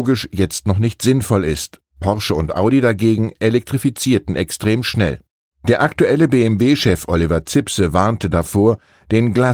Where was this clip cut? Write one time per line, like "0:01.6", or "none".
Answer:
none